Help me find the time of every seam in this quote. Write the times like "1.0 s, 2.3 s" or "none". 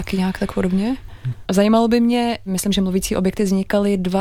1.4 s, 2.5 s